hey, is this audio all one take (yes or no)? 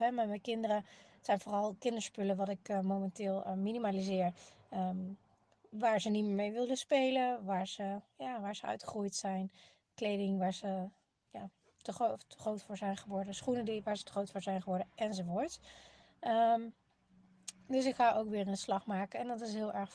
yes